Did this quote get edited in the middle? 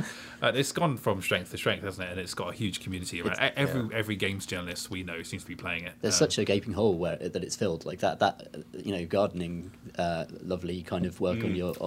no; 0 cuts

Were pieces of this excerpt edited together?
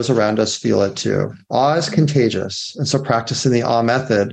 no; 0 cuts

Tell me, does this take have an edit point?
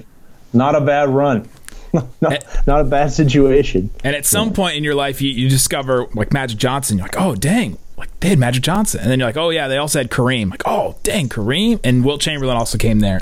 no; 0 cuts

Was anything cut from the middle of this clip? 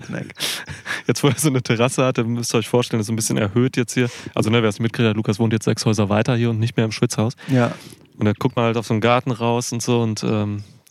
no; 0 cuts

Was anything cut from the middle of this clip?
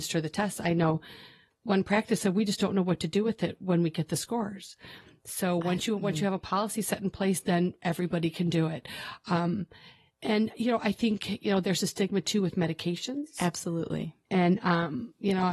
no; 0 cuts

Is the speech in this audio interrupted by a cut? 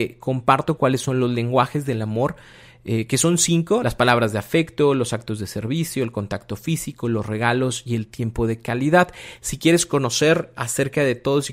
no; 0 cuts

